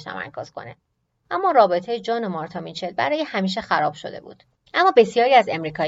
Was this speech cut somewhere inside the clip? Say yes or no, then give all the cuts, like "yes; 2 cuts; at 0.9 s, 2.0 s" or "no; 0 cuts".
yes; 1 cut; at 4.7 s